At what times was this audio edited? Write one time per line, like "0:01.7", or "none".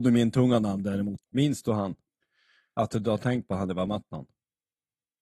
0:01.2